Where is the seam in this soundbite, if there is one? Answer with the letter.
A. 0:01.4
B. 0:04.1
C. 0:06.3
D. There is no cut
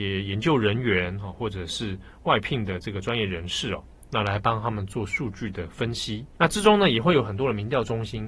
C